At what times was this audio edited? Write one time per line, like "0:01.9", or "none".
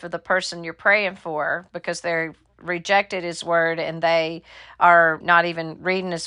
0:05.2